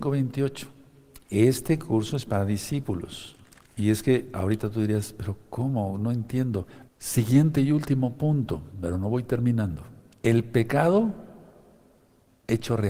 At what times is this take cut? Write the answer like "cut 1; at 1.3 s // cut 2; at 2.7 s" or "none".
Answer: cut 1; at 1.2 s // cut 2; at 6.9 s